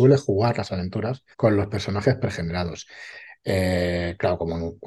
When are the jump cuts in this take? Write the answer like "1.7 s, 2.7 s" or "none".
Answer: 1.3 s